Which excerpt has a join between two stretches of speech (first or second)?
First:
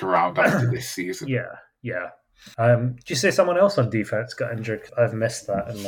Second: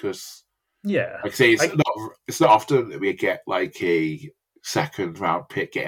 first